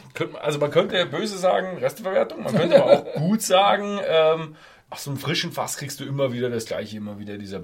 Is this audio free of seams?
no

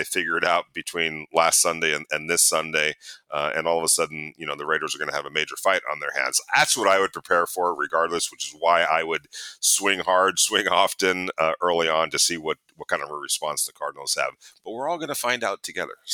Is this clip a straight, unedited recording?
yes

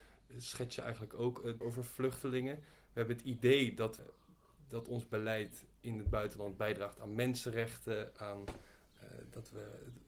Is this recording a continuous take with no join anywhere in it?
no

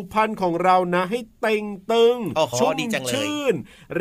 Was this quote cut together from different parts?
yes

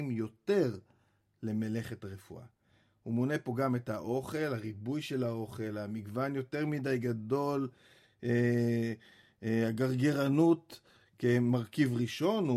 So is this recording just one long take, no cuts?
yes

